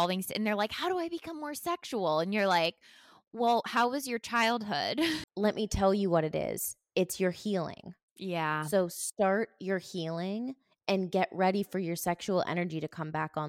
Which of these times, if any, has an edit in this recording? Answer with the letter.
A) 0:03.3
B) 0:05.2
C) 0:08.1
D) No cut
B